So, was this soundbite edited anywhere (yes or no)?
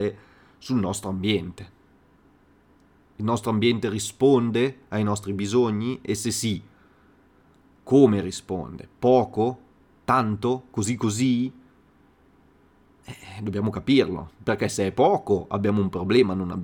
no